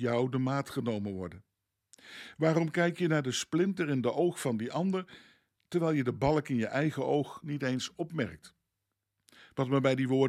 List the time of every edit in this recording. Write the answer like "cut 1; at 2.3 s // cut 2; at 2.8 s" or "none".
none